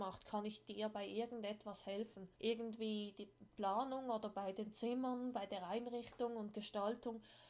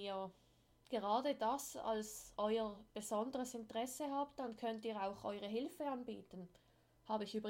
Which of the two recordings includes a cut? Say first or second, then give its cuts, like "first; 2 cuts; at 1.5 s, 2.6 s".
first; 2 cuts; at 2.4 s, 3.5 s